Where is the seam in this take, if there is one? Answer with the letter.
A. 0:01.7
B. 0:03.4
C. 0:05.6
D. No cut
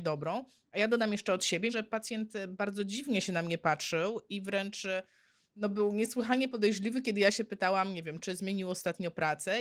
A